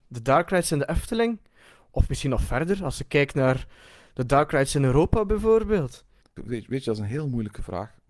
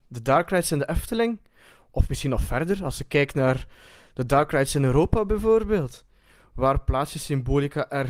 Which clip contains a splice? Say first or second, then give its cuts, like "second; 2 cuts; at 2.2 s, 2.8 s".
first; 1 cut; at 6.2 s